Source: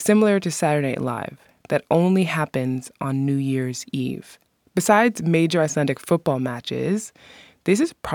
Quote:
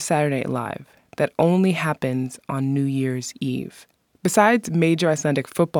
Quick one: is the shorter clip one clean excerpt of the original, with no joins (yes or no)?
yes